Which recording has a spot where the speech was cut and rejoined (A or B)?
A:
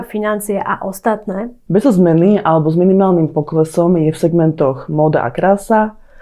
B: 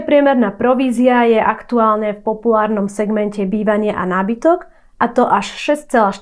A